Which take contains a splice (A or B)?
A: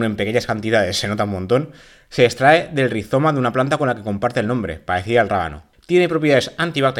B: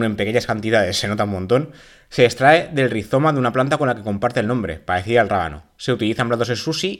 A